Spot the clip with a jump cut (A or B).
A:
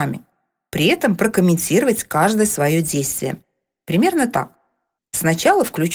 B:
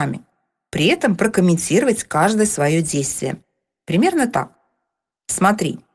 A